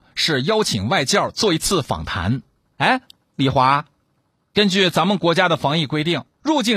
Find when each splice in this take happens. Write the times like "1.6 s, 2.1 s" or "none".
none